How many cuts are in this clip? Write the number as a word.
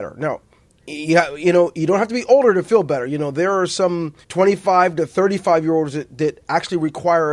one